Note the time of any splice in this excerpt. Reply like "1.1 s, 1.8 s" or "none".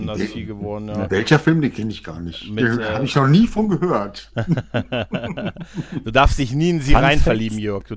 none